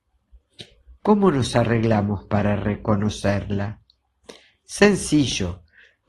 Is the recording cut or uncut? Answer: uncut